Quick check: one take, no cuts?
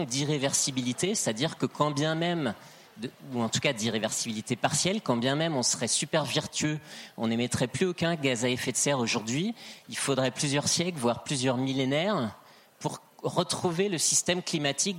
yes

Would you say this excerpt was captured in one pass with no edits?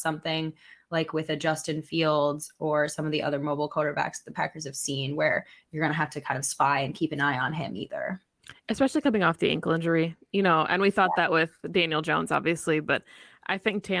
yes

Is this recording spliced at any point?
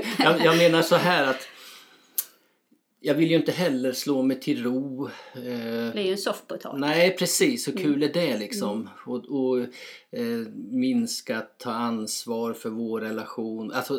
no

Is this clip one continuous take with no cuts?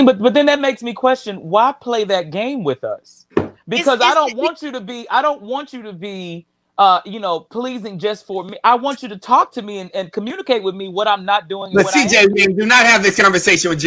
no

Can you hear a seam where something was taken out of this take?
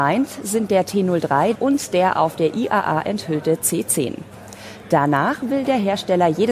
yes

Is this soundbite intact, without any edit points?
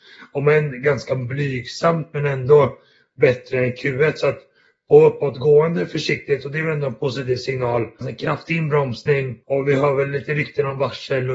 no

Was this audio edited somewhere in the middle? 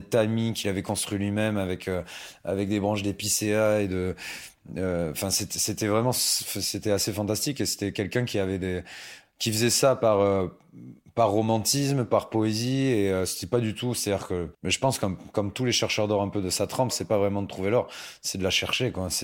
yes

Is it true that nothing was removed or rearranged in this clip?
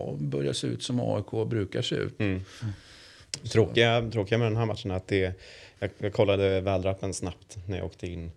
yes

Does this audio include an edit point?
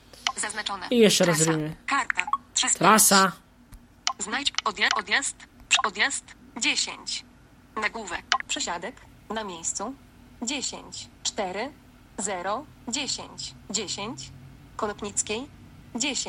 yes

